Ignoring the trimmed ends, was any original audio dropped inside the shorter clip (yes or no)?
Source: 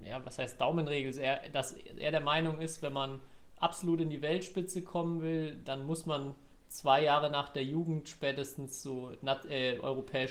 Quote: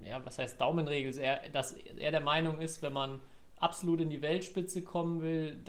no